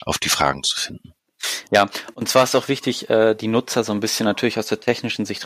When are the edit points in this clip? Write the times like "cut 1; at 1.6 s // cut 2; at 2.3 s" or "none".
none